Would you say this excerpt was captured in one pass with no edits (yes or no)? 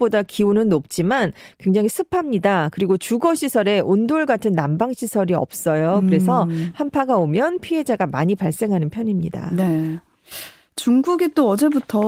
yes